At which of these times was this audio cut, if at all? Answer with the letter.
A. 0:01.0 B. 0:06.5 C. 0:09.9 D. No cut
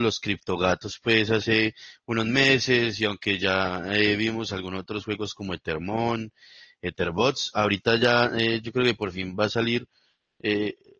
D